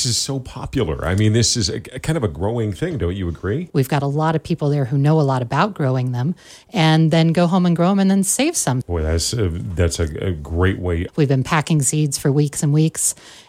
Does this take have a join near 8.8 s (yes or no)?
yes